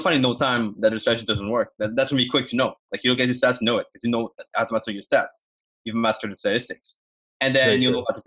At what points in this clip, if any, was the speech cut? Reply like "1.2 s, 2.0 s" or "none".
none